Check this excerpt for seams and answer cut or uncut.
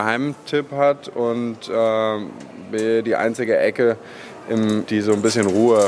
cut